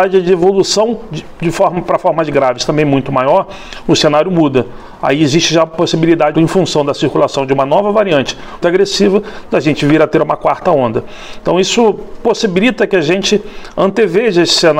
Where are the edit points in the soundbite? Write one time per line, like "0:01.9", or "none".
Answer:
0:06.3
0:08.6